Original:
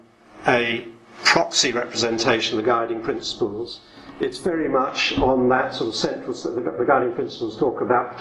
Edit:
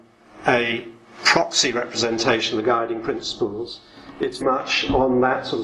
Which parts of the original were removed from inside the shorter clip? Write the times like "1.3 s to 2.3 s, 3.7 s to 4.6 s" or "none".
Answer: 4.4 s to 4.7 s